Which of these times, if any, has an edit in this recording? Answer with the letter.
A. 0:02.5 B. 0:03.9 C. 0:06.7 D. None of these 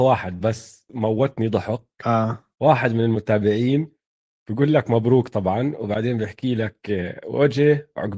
A